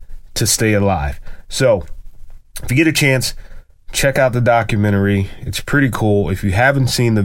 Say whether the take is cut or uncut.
uncut